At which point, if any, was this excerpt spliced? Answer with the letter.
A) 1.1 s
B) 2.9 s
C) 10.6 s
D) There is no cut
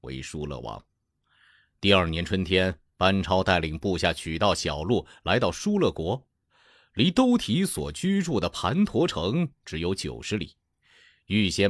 D